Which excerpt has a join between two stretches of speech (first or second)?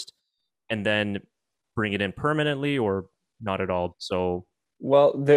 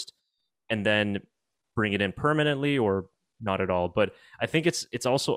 first